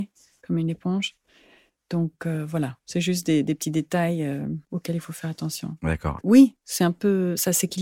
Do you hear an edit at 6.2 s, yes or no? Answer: yes